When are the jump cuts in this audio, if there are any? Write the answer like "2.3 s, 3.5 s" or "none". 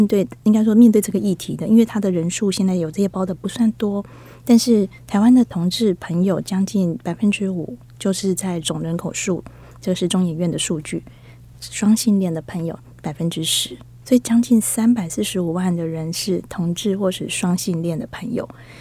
3.1 s